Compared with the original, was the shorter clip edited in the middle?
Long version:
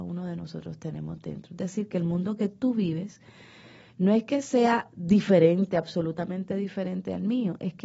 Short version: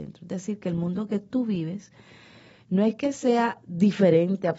no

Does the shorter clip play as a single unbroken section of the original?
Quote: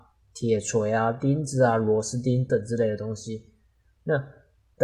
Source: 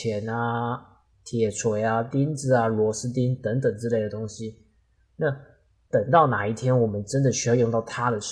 no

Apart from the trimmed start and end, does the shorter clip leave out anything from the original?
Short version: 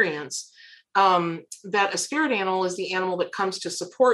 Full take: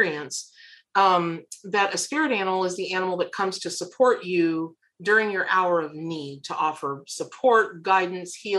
no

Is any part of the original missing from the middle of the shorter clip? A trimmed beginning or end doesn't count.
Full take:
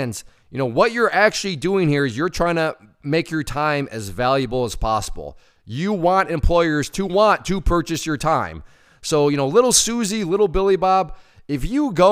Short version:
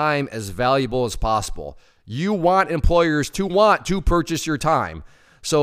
no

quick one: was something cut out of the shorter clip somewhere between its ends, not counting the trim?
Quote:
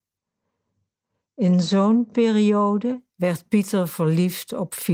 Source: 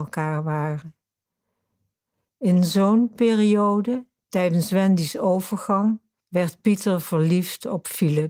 yes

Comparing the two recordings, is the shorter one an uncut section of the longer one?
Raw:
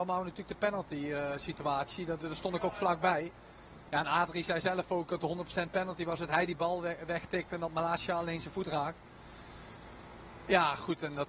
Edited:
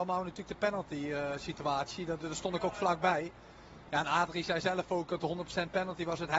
yes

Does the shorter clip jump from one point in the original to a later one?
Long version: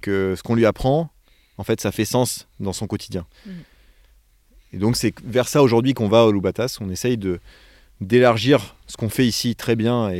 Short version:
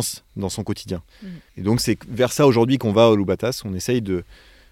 yes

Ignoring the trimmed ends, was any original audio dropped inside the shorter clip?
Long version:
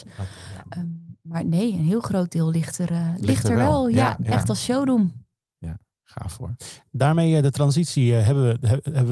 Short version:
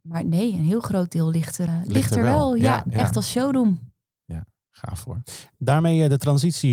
yes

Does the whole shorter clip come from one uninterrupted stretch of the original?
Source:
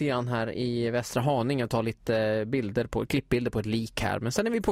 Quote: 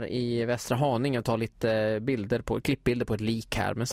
yes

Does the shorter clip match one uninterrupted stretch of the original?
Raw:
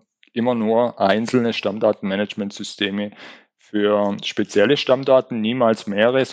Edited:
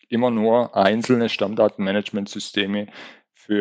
yes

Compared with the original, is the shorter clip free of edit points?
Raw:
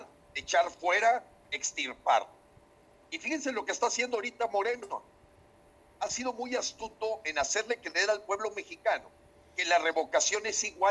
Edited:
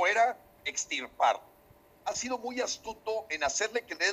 no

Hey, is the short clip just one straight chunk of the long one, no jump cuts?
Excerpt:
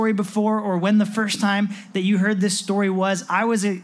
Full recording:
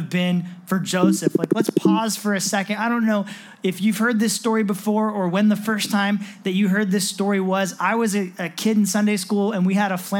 yes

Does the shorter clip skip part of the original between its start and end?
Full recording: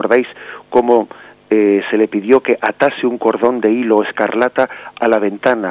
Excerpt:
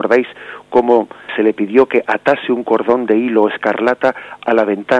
yes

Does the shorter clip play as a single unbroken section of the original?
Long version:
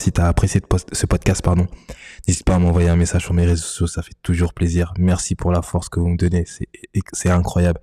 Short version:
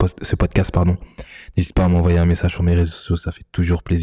yes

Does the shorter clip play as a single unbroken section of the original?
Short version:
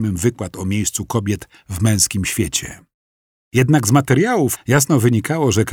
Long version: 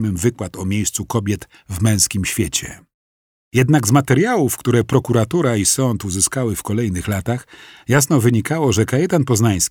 no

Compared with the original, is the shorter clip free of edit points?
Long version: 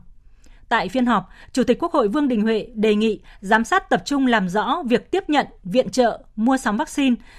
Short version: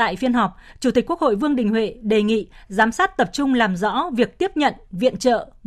yes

